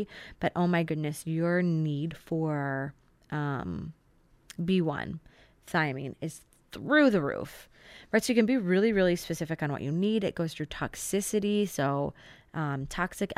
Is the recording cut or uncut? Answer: uncut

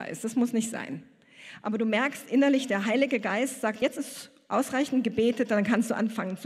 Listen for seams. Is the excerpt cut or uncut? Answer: uncut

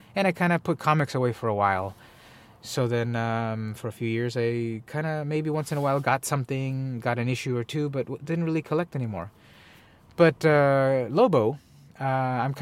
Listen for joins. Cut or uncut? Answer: uncut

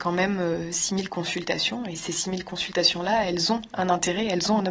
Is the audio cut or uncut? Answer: uncut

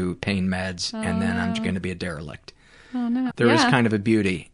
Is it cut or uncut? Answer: cut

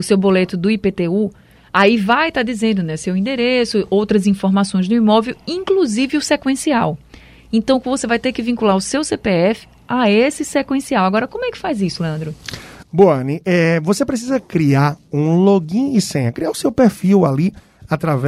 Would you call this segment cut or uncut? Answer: uncut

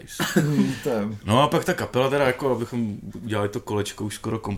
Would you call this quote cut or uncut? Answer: uncut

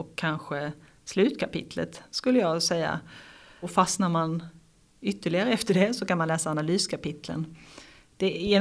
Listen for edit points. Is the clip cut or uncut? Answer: uncut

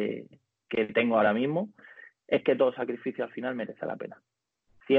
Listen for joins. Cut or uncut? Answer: uncut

